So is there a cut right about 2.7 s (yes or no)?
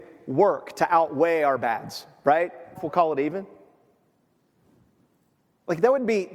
yes